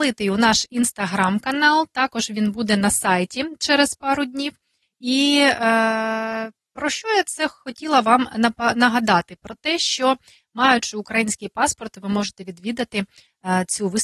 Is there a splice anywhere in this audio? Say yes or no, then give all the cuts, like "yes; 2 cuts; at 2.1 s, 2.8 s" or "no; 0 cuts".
no; 0 cuts